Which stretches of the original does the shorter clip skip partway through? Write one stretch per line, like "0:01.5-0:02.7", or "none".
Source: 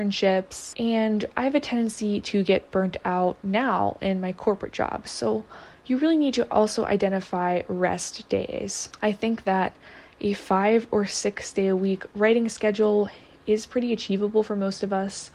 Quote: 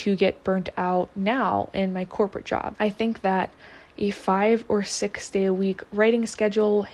0:05.0-0:09.0